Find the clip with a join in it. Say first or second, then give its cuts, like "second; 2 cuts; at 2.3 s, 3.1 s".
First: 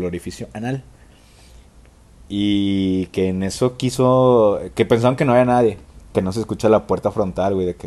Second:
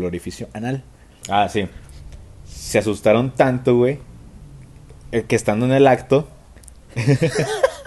second; 1 cut; at 1.2 s